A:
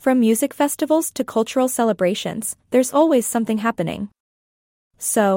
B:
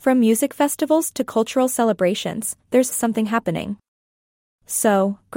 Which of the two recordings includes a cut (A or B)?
B